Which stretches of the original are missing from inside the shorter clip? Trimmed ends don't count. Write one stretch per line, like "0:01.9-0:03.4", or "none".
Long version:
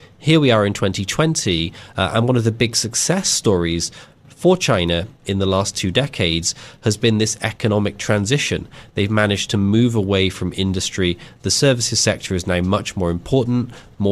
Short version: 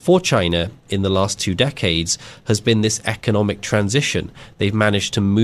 none